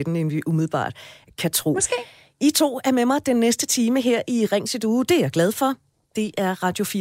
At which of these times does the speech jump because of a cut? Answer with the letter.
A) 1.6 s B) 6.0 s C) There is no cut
C